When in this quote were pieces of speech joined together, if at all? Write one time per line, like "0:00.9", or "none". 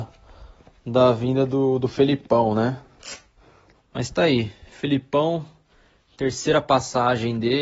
0:03.7